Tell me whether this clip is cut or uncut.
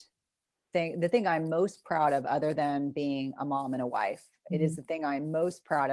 uncut